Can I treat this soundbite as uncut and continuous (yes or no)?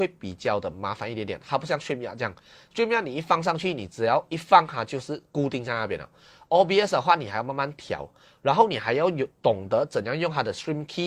yes